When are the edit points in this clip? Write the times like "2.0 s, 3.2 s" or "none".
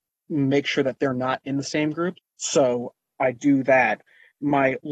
2.1 s